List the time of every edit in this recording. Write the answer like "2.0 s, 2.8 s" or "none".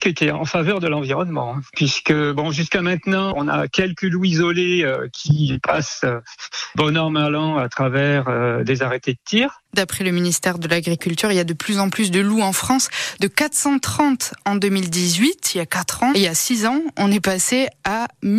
9.7 s, 16.1 s